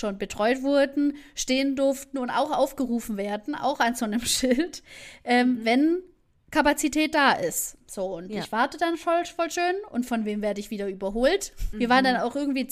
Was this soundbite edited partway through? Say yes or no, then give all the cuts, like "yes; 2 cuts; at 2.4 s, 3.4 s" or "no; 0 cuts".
yes; 1 cut; at 11.7 s